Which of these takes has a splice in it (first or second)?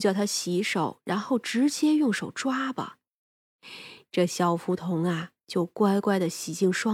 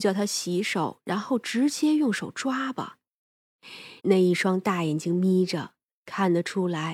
second